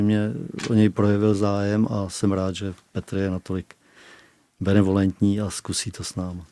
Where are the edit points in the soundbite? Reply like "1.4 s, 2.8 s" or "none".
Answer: none